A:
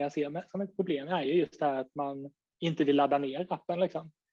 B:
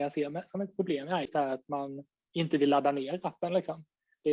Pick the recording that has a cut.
B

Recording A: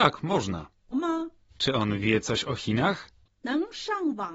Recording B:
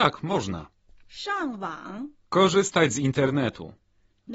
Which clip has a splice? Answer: A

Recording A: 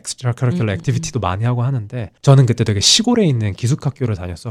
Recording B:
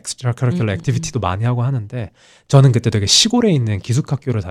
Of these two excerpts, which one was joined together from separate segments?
A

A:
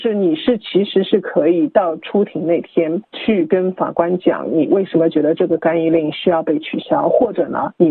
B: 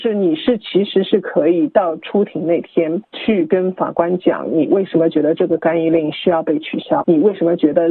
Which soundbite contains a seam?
B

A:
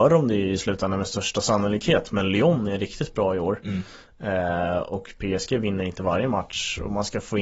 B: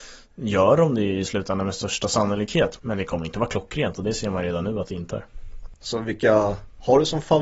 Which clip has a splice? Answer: B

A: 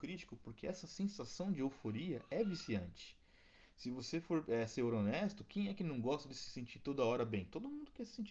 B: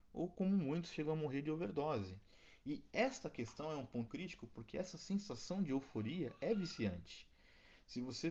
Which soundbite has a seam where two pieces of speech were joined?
B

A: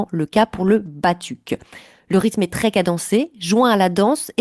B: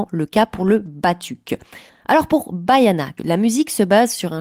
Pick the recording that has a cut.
B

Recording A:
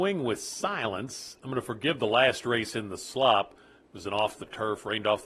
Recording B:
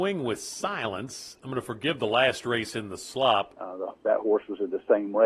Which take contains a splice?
B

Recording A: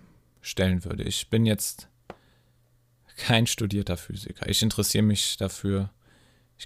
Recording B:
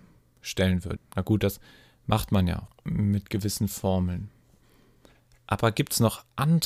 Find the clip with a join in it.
B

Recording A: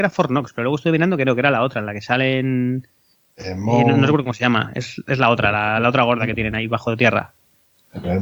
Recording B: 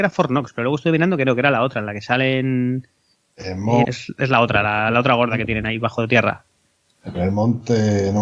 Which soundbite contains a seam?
B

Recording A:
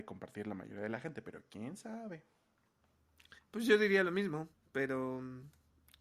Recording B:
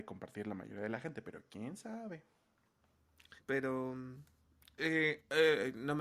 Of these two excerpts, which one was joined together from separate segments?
B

